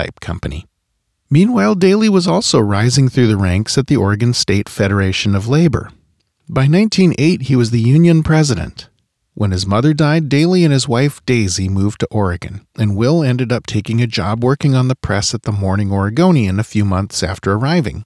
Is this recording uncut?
no; 2 cuts; at 9.2 s, 12.7 s

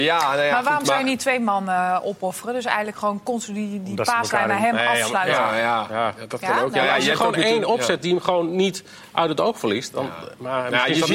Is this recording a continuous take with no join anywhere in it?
yes; 0 cuts

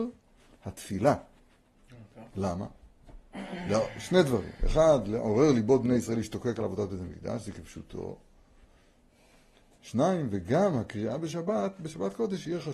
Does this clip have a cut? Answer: yes; 1 cut; at 2.3 s

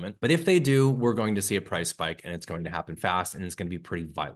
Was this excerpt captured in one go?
no; 1 cut; at 3.0 s

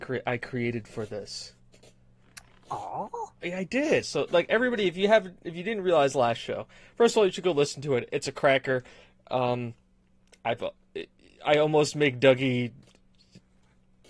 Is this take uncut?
no; 1 cut; at 4.0 s

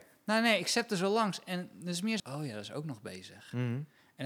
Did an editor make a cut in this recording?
yes; 1 cut; at 2.2 s

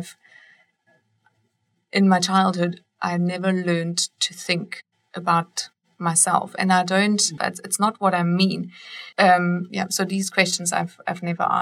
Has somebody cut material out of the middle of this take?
yes; 2 cuts; at 7.4 s, 9.1 s

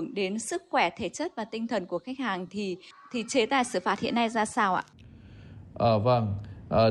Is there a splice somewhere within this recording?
no; 0 cuts

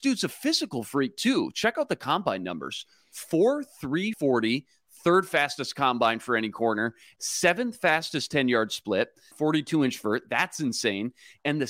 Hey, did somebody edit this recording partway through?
yes; 2 cuts; at 4.1 s, 9.3 s

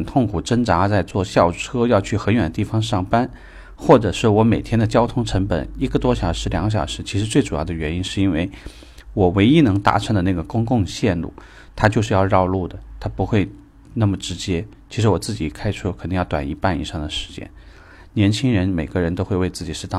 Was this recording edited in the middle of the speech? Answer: no; 0 cuts

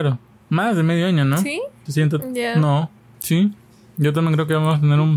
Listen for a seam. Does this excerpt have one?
yes; 2 cuts; at 1.9 s, 3.1 s

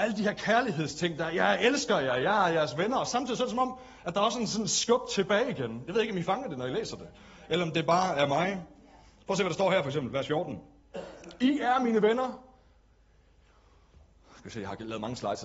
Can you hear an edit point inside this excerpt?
no; 0 cuts

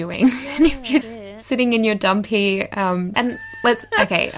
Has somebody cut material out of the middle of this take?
yes; 2 cuts; at 1.0 s, 3.1 s

